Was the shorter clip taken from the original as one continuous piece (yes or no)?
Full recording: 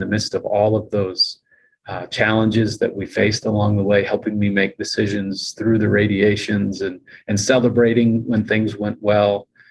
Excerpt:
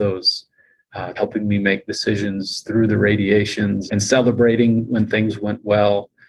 no